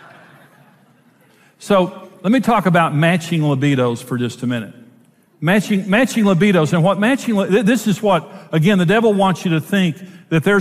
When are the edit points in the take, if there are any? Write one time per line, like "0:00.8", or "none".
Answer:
0:05.3